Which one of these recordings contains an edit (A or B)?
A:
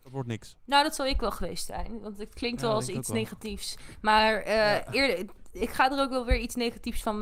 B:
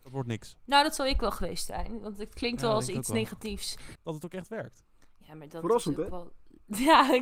B